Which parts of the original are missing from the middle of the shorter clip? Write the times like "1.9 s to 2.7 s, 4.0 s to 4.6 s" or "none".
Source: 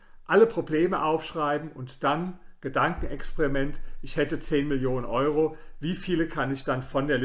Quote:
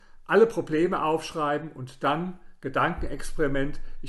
none